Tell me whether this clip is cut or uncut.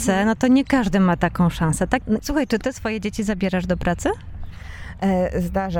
cut